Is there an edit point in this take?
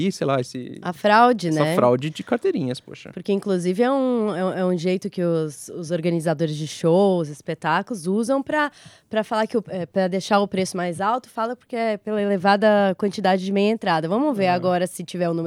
no; 0 cuts

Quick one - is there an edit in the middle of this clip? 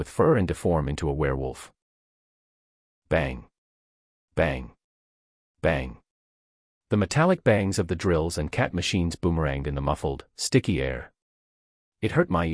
no; 0 cuts

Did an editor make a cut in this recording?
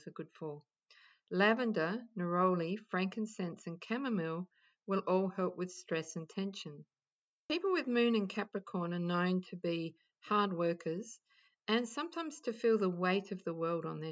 yes; 1 cut; at 1.1 s

